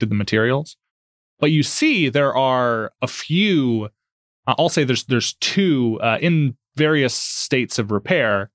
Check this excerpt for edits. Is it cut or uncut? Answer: uncut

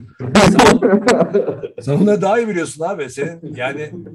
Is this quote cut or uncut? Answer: uncut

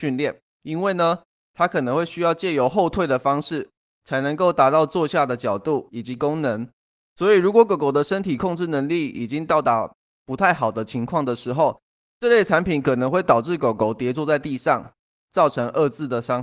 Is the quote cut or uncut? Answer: uncut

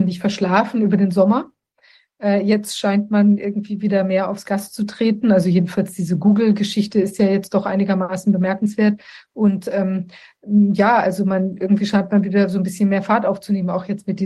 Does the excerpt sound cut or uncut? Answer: uncut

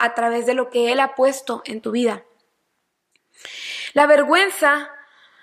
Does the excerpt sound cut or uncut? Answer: uncut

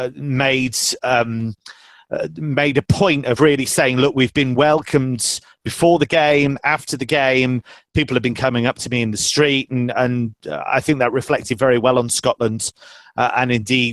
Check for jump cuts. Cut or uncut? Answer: uncut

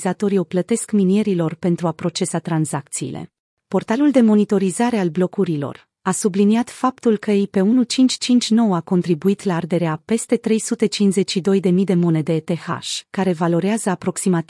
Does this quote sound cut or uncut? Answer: cut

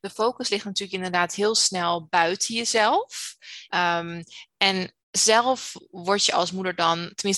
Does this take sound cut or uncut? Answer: cut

